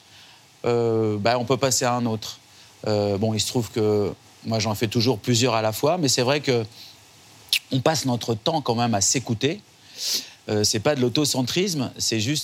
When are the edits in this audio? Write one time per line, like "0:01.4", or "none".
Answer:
none